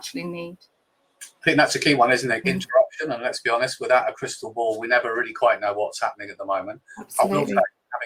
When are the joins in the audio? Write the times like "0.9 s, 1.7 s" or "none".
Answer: 2.4 s